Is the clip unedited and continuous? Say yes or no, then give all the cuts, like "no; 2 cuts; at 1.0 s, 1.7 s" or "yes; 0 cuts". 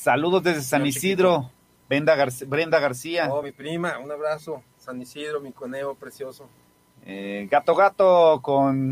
yes; 0 cuts